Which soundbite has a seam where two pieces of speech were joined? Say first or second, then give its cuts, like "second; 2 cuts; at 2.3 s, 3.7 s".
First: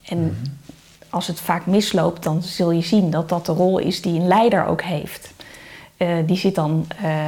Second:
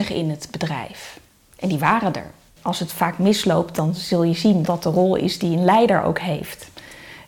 second; 2 cuts; at 2.6 s, 4.6 s